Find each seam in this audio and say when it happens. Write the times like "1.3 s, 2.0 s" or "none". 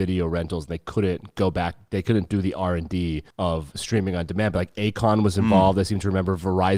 3.3 s